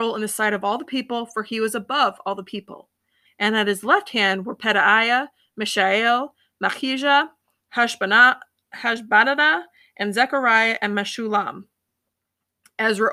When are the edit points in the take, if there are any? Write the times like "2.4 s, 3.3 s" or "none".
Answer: 3.2 s, 7.6 s